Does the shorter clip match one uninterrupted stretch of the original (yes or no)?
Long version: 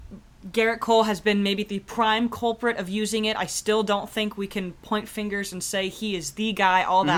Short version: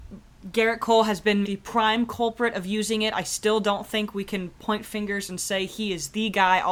no